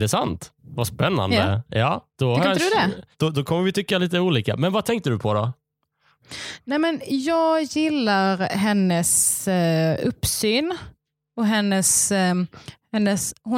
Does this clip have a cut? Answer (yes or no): no